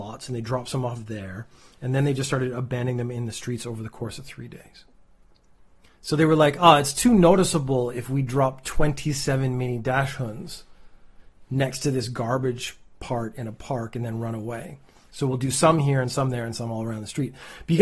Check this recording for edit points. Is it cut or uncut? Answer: uncut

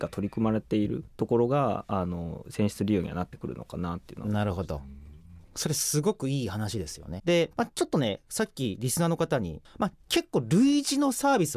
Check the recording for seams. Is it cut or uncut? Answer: cut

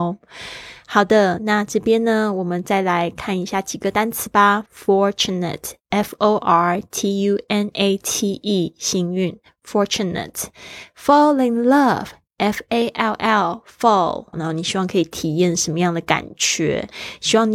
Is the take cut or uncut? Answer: cut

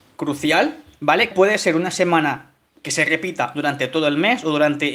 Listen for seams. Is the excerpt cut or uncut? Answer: cut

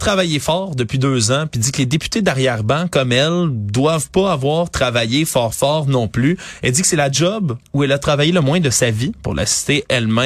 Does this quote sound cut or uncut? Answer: uncut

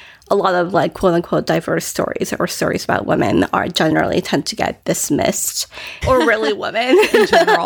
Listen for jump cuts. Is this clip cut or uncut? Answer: cut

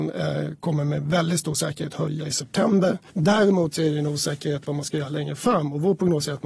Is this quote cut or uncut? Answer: cut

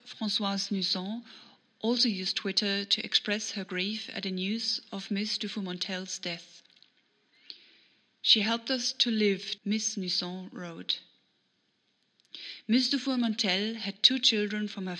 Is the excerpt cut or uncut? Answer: cut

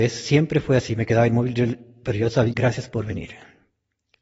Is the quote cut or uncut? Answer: cut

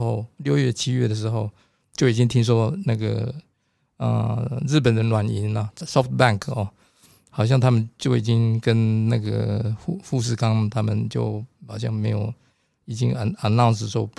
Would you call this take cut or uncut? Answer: cut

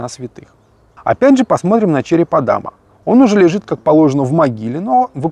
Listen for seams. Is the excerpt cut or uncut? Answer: uncut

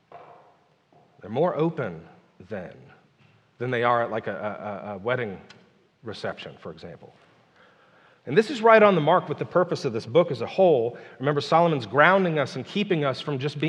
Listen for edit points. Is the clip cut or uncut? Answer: uncut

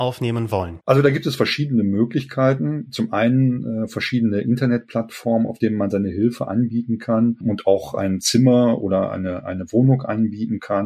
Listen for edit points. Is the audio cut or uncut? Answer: uncut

